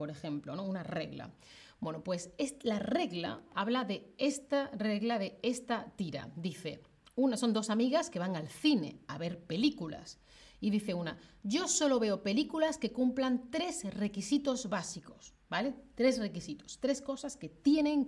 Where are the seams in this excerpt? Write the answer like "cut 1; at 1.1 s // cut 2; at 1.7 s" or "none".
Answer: none